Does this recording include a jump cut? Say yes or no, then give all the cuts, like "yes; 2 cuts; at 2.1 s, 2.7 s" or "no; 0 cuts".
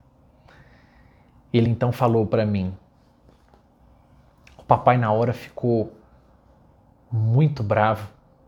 no; 0 cuts